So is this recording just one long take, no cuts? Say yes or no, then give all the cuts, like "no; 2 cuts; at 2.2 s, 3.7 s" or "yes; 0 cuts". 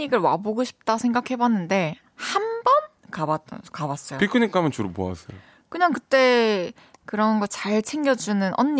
yes; 0 cuts